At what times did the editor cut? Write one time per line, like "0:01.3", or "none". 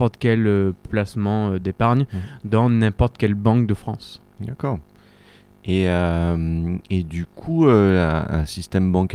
none